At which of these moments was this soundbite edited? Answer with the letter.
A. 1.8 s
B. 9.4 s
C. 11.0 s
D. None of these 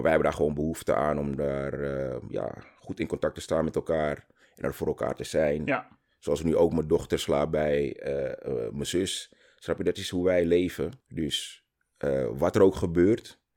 C